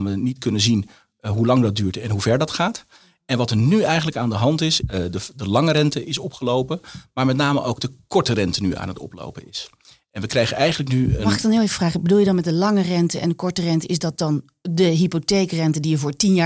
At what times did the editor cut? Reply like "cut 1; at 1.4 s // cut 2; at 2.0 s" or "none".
cut 1; at 4.8 s